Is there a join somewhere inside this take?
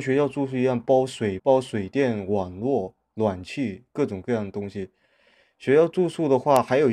yes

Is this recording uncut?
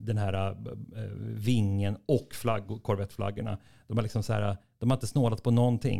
yes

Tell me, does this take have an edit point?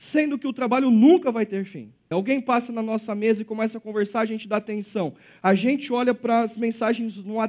yes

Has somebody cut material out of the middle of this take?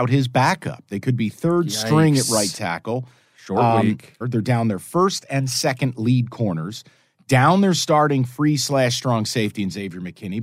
yes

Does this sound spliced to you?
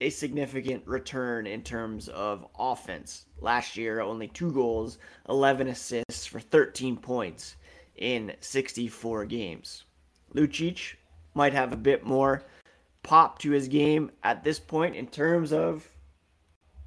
no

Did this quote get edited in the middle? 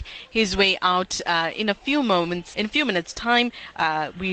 yes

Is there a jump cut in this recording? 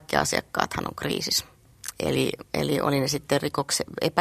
no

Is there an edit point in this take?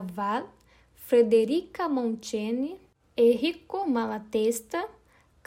no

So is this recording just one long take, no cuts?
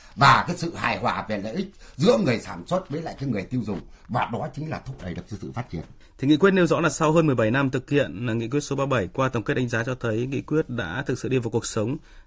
no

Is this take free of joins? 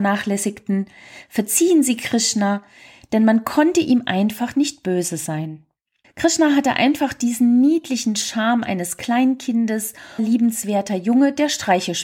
no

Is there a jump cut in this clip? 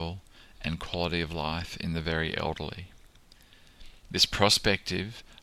no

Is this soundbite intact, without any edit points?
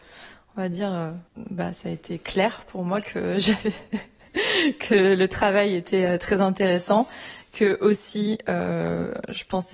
no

